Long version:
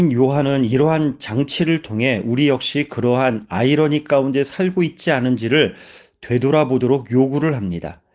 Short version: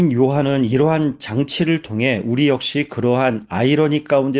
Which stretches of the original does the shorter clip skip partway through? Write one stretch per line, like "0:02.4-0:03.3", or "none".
none